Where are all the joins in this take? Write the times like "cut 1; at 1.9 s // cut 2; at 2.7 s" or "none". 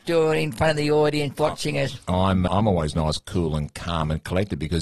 cut 1; at 2.5 s